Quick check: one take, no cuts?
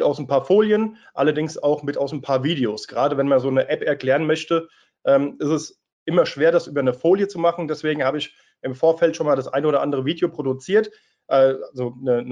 yes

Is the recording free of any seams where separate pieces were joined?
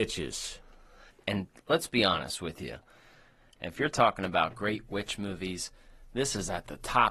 no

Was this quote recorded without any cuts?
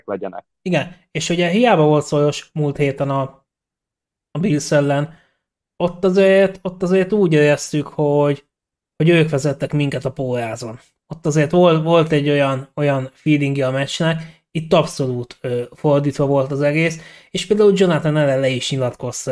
yes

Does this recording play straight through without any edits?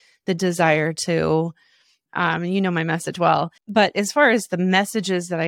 no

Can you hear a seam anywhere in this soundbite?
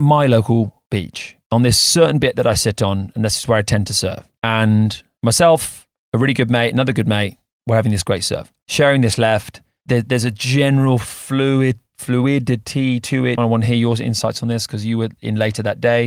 yes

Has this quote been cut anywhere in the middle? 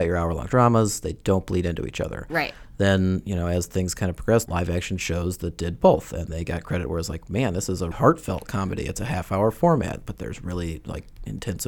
yes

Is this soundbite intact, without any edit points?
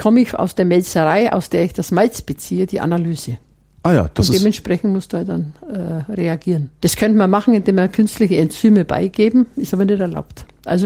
no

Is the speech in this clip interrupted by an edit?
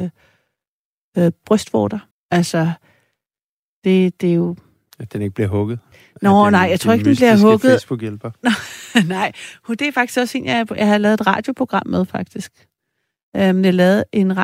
yes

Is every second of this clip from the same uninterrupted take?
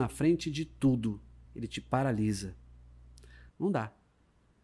no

